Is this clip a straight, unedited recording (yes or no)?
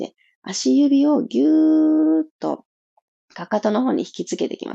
yes